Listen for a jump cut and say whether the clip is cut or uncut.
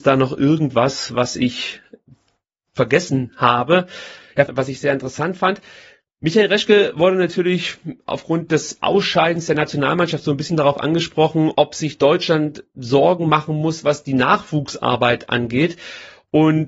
cut